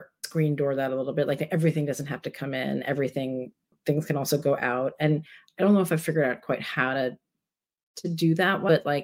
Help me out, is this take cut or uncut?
uncut